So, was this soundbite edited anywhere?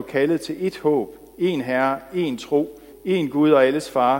yes; 1 cut; at 2.9 s

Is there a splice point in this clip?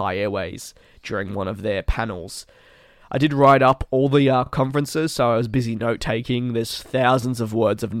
no; 0 cuts

